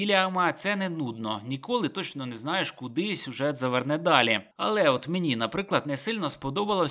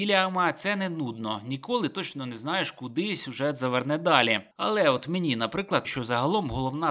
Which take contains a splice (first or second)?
second